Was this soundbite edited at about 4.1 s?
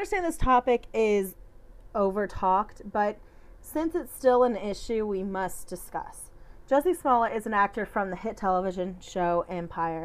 no; 0 cuts

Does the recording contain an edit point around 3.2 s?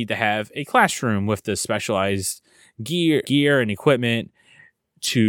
yes; 1 cut; at 3.2 s

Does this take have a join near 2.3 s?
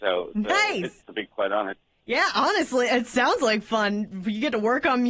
no; 1 cut; at 1.0 s

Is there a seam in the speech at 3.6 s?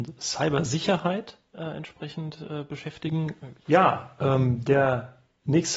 yes; 1 cut; at 3.6 s

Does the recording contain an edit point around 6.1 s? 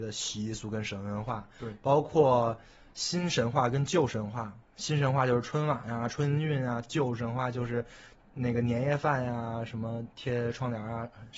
no; 0 cuts

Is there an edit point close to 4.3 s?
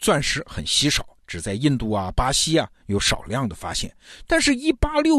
yes; 1 cut; at 4.3 s

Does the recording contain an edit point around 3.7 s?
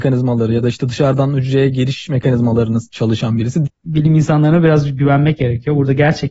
yes; 1 cut; at 3.7 s

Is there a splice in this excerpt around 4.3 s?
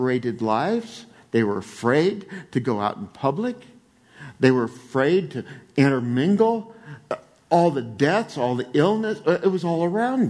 no; 0 cuts

